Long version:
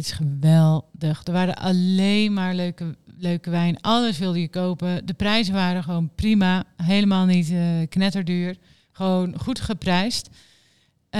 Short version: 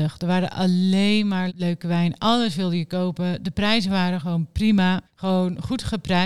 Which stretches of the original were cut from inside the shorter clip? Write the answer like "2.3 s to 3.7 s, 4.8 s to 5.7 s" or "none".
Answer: 2.5 s to 3.1 s, 6.7 s to 8.8 s